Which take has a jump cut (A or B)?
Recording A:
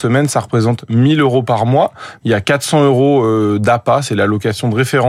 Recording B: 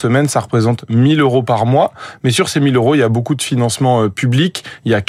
A